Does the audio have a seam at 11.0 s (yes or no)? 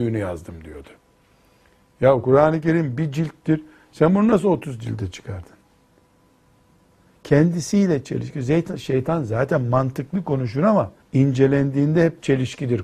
yes